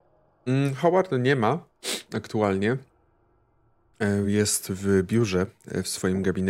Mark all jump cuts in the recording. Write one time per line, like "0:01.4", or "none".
none